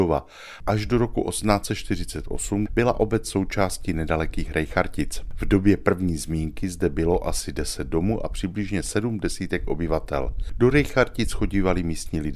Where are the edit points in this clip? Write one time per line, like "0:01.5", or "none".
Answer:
0:02.7